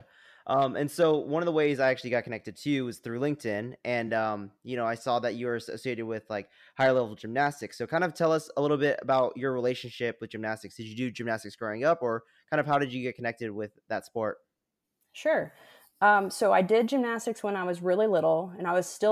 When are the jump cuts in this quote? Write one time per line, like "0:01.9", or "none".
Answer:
none